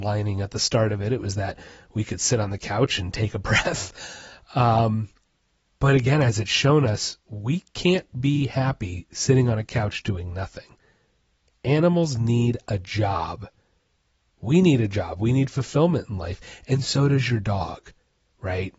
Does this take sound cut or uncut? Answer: cut